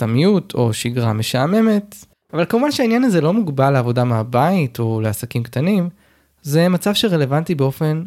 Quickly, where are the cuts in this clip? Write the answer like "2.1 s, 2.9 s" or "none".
2.1 s